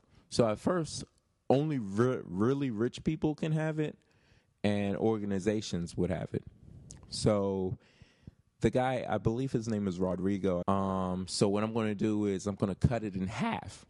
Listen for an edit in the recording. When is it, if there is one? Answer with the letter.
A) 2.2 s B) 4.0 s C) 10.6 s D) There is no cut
C